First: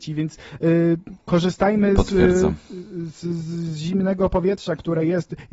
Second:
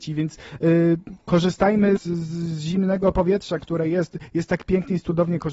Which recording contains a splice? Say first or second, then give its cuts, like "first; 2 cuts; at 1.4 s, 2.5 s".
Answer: second; 1 cut; at 2.0 s